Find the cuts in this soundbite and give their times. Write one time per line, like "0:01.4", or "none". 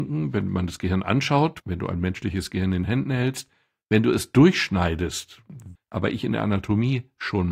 0:05.8